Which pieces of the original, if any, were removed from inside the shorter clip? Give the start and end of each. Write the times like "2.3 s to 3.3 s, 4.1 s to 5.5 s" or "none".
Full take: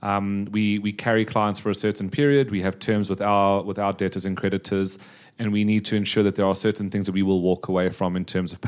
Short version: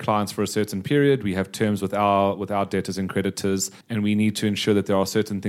5.1 s to 5.3 s